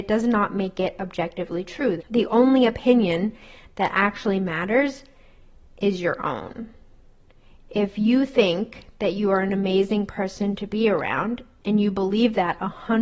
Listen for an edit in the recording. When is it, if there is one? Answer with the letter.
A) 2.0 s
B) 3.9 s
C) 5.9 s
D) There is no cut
A